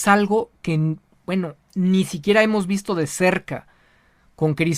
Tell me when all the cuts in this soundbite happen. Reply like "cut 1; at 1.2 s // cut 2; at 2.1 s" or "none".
none